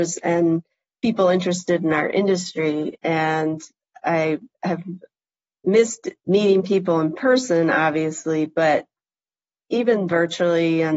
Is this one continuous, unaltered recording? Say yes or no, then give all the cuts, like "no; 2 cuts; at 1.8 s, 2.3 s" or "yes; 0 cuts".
no; 2 cuts; at 3.0 s, 6.2 s